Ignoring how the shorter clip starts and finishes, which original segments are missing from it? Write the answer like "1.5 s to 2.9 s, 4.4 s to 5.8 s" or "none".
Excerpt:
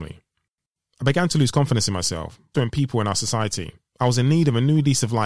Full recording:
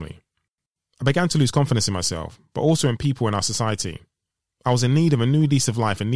2.5 s to 2.8 s, 4.1 s to 4.5 s